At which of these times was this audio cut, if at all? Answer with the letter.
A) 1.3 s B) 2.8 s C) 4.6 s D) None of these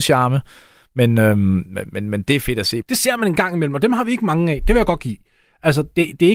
B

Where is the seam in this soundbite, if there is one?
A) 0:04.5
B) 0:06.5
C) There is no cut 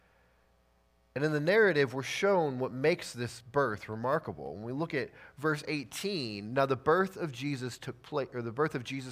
C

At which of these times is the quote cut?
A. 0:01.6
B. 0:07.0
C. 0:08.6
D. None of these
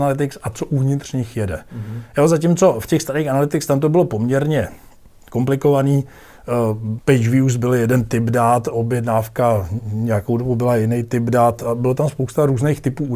B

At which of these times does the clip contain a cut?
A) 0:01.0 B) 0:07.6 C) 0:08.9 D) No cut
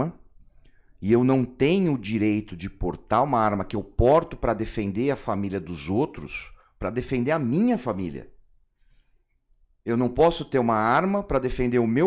D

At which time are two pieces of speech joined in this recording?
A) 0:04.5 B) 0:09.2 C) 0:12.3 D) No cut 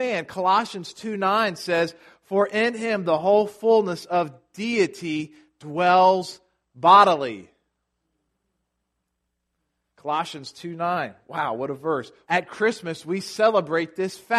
C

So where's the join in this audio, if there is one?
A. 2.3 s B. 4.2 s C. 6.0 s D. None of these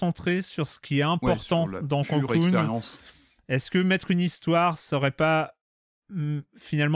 D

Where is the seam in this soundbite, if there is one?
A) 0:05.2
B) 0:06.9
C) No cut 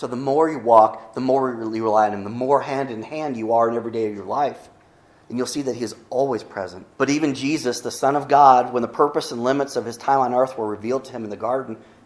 B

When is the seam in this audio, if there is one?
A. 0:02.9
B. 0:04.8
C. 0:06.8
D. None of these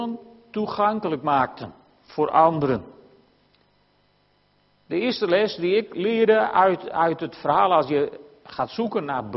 D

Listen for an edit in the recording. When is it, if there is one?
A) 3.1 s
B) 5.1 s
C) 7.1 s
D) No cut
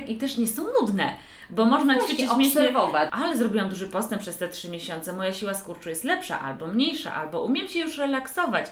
A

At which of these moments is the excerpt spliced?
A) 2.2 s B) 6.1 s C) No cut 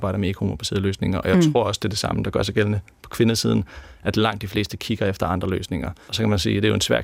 B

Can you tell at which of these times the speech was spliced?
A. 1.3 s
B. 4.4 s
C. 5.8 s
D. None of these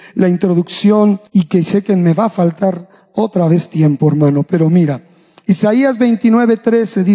A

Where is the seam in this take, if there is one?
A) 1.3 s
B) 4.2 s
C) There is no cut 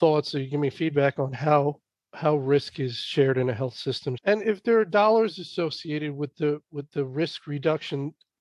B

